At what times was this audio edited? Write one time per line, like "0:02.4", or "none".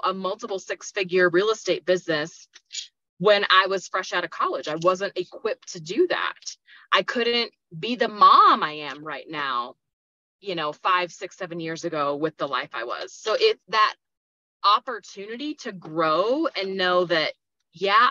0:13.6